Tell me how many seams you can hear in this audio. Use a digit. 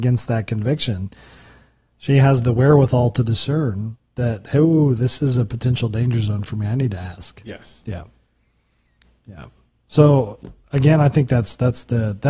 0